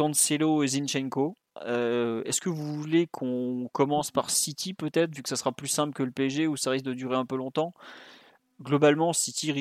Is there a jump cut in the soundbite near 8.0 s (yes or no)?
no